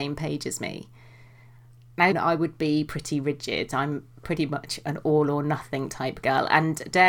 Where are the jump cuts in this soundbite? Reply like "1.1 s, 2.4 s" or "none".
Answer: 2.1 s